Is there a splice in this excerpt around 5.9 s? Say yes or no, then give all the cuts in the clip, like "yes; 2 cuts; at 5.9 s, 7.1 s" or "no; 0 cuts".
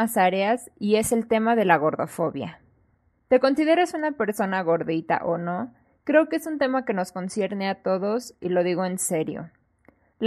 no; 1 cut; at 3.1 s